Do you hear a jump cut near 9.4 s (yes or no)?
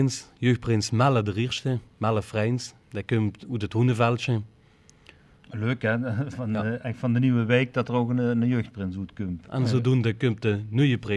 yes